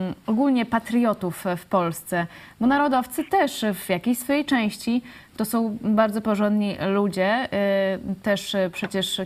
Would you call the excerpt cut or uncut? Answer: uncut